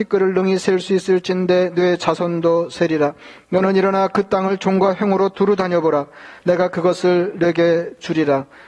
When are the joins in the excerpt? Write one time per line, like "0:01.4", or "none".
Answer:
none